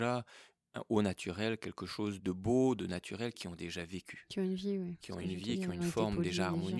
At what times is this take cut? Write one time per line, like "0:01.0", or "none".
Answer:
0:02.2
0:03.3